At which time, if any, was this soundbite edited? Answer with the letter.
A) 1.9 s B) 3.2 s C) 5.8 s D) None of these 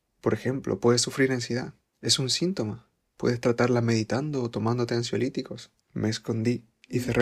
C